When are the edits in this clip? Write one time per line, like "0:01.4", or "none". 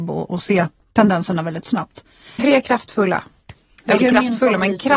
0:02.4
0:04.0